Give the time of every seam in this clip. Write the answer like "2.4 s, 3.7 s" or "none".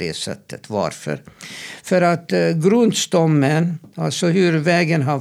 none